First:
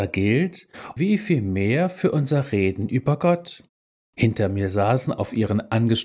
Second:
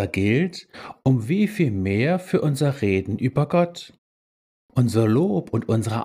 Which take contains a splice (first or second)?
first